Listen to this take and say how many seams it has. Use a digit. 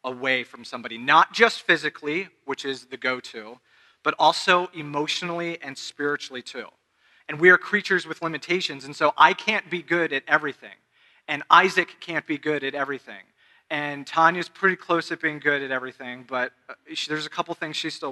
1